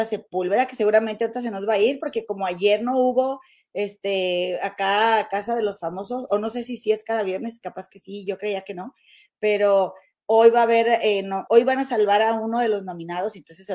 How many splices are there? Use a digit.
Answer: 1